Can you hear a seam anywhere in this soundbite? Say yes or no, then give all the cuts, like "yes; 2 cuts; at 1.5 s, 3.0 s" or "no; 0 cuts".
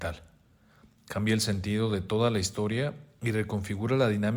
no; 0 cuts